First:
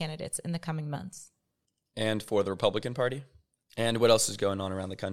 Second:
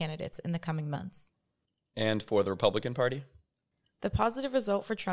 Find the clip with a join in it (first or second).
first